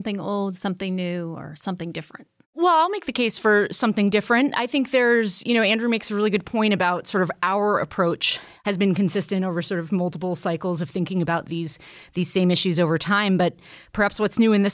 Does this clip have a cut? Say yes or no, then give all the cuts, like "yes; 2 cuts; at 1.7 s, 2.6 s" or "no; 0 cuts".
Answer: no; 0 cuts